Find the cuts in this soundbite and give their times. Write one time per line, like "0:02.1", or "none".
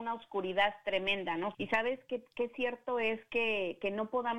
0:01.5